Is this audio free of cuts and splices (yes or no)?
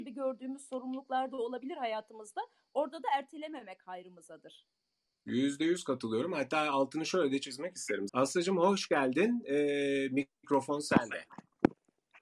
no